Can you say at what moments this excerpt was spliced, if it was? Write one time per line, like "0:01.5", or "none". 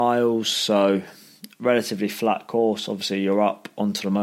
none